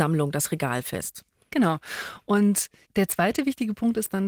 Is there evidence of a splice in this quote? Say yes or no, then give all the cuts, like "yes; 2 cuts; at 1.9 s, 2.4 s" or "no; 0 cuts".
no; 0 cuts